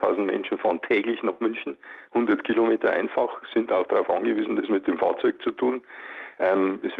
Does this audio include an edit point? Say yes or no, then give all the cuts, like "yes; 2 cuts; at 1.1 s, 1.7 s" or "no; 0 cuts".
no; 0 cuts